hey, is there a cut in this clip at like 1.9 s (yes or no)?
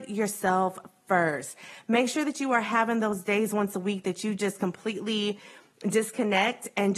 no